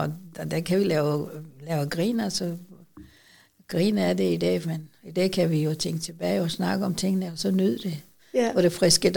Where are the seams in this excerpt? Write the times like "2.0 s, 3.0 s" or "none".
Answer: 4.6 s, 8.2 s

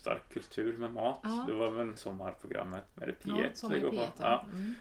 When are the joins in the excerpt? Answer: 2.0 s

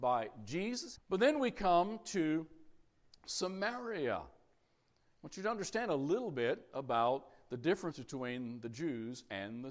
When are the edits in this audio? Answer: 0.9 s

